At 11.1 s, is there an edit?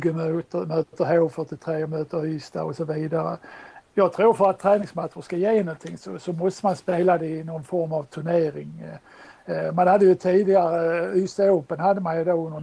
yes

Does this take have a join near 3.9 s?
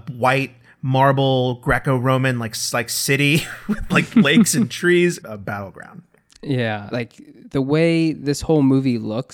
no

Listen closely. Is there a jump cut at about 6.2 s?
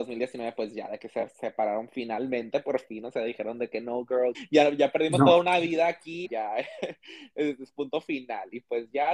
yes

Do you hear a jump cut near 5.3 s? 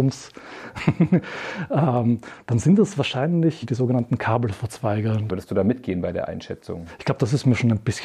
yes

